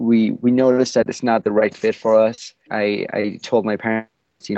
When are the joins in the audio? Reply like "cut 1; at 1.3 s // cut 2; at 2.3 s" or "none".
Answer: cut 1; at 2.7 s